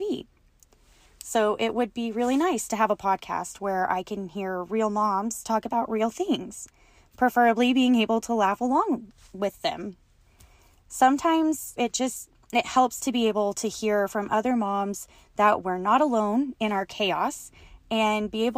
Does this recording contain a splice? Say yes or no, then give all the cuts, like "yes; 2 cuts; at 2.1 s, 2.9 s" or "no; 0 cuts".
yes; 1 cut; at 11.8 s